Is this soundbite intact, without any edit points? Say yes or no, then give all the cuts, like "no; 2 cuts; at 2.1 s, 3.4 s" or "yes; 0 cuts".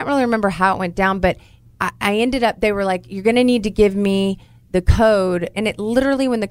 no; 1 cut; at 5.5 s